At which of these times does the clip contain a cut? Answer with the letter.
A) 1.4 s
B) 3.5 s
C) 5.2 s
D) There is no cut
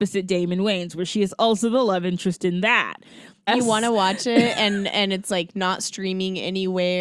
B